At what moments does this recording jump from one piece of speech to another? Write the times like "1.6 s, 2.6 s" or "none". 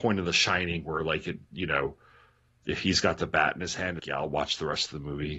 4.0 s